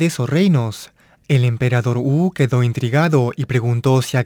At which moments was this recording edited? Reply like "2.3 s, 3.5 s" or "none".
1.2 s